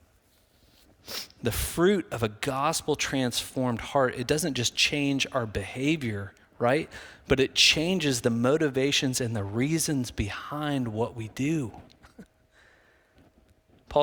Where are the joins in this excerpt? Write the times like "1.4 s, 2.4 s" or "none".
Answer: none